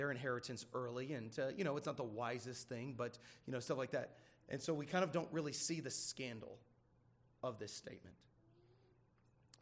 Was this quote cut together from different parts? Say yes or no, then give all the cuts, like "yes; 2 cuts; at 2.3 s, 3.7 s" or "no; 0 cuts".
no; 0 cuts